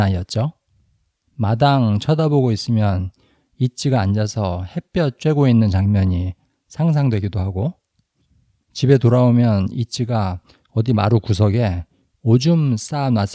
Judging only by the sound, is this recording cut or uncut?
cut